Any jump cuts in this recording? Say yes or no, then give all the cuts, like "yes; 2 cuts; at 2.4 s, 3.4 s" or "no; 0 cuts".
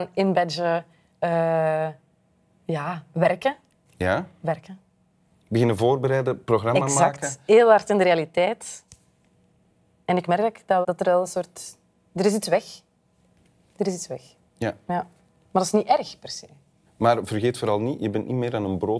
yes; 2 cuts; at 10.8 s, 16.9 s